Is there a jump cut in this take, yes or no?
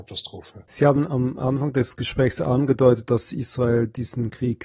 no